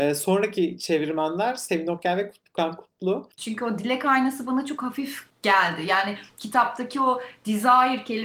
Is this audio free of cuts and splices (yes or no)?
no